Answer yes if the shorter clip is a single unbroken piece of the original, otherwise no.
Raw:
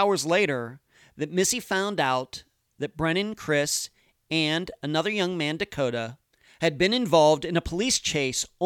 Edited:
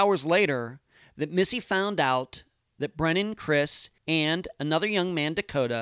no